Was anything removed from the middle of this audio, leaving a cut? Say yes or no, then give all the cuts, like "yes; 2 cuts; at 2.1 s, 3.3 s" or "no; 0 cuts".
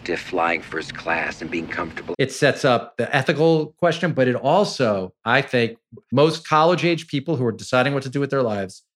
yes; 2 cuts; at 2.1 s, 6.1 s